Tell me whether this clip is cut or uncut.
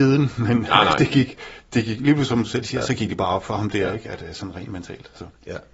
uncut